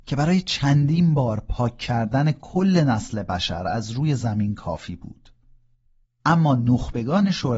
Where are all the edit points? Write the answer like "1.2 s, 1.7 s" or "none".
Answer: 6.0 s